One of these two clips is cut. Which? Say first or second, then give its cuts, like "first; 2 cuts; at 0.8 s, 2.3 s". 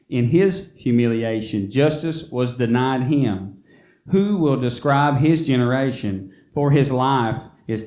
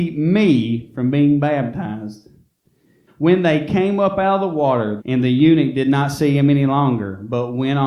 second; 2 cuts; at 3.1 s, 5.0 s